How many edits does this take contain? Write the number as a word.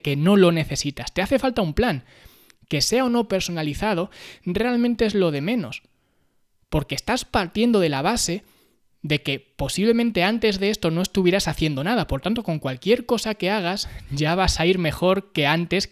zero